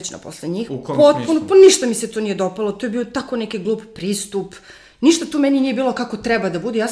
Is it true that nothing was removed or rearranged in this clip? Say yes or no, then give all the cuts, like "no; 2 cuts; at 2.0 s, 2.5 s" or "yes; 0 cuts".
yes; 0 cuts